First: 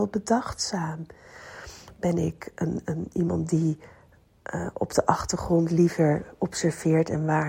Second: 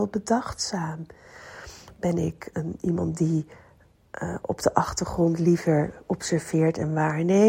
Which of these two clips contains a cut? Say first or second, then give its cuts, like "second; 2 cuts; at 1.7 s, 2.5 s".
second; 1 cut; at 2.5 s